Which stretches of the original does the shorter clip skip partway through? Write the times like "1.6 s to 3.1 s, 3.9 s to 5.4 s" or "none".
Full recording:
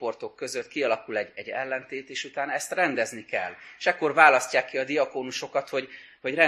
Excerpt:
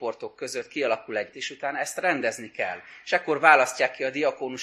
1.3 s to 2.1 s